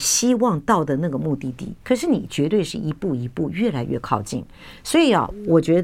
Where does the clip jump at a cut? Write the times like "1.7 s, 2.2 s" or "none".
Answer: 1.8 s